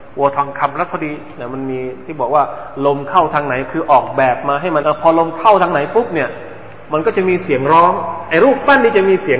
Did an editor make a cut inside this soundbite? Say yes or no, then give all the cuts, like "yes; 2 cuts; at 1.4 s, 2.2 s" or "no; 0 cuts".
yes; 1 cut; at 4.8 s